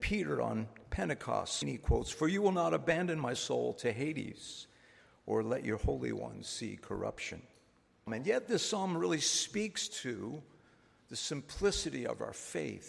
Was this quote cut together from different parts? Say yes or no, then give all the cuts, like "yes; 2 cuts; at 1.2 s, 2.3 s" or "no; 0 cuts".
yes; 2 cuts; at 1.6 s, 8.1 s